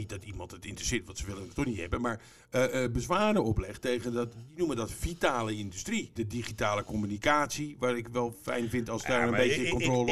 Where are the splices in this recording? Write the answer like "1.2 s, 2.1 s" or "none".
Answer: 6.2 s